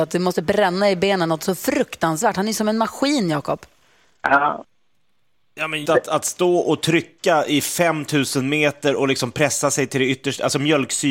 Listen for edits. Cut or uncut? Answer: cut